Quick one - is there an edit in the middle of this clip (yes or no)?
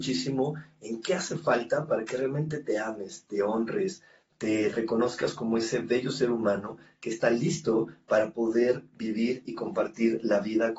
no